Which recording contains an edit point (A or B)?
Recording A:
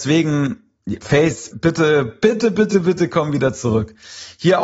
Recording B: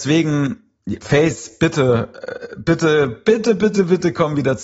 A